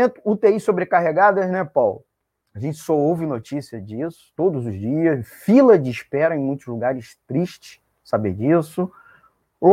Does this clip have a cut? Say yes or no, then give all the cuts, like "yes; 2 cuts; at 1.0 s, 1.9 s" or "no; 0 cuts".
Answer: no; 0 cuts